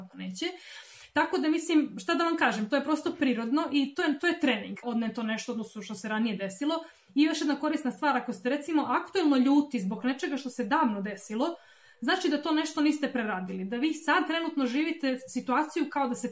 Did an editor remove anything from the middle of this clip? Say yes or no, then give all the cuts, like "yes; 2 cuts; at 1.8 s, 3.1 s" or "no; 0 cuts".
yes; 1 cut; at 4.8 s